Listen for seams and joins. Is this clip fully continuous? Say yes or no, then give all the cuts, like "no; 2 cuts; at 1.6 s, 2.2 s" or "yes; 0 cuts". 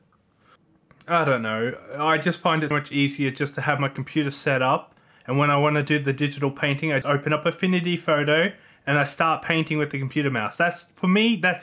no; 2 cuts; at 2.7 s, 7.0 s